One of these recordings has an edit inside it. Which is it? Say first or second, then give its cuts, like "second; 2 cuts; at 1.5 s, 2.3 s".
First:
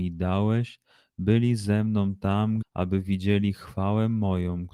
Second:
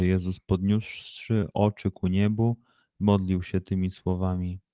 first; 1 cut; at 2.6 s